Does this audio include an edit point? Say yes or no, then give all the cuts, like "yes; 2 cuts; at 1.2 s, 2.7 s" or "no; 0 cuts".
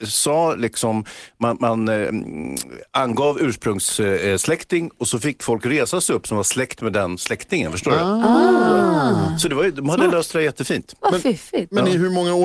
no; 0 cuts